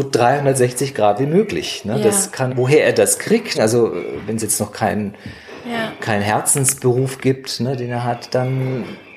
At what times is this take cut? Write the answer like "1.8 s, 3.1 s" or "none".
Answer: 2.5 s, 3.5 s